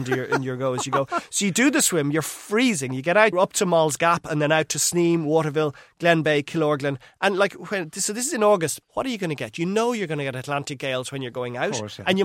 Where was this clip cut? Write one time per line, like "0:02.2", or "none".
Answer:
0:03.3
0:08.8